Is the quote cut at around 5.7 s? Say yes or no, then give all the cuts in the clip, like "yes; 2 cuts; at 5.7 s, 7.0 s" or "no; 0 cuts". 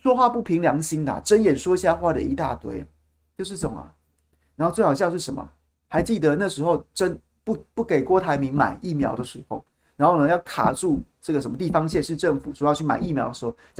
yes; 1 cut; at 5.7 s